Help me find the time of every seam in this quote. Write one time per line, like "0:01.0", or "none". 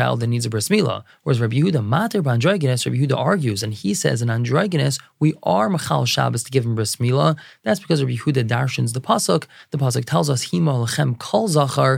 none